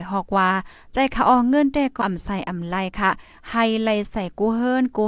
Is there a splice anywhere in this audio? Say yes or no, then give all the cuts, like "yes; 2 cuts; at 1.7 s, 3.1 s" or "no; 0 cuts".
yes; 1 cut; at 2.0 s